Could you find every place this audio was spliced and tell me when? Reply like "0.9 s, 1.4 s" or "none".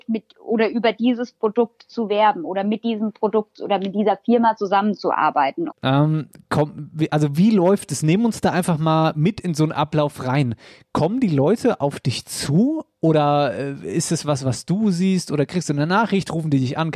5.7 s